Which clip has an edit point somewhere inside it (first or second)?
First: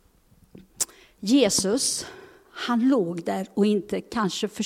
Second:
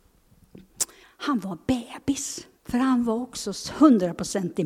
second